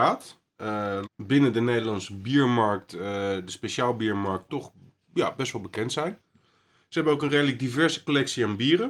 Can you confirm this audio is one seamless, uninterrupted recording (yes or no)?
no